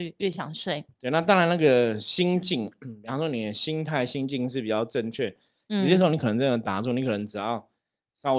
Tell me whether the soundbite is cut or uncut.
uncut